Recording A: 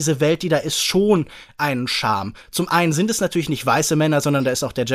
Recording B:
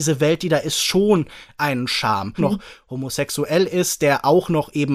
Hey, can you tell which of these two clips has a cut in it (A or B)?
B